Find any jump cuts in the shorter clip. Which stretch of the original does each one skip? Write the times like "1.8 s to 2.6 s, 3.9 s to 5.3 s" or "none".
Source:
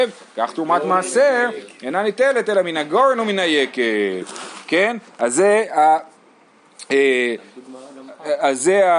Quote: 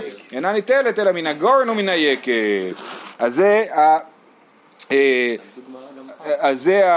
4.6 s to 5.1 s